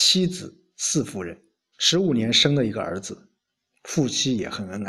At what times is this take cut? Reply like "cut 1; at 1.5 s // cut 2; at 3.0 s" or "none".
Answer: cut 1; at 1.7 s

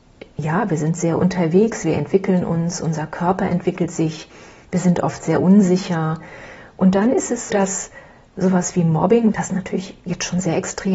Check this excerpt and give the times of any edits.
cut 1; at 7.5 s // cut 2; at 9.3 s

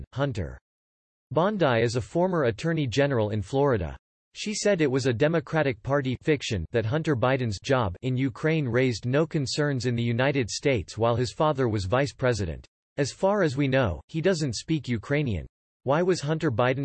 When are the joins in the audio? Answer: cut 1; at 12.8 s

